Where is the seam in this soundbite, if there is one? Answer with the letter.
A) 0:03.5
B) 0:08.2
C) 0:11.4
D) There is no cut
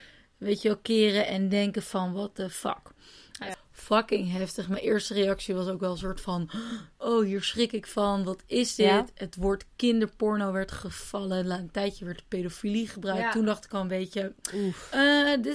A